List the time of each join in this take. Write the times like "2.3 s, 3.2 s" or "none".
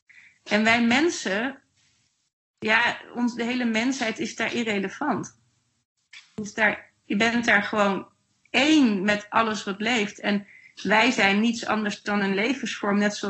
none